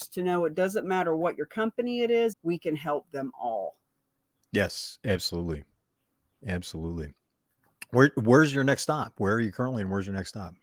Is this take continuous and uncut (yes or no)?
no